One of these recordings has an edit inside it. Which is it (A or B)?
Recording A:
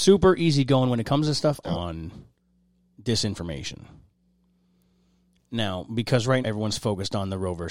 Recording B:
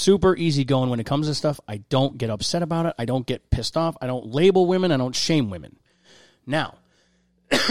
A